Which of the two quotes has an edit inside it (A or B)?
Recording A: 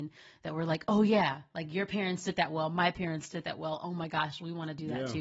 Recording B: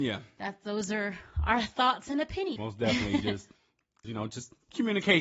B